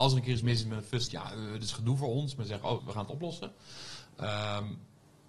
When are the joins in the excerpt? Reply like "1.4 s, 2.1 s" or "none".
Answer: 1.1 s, 2.8 s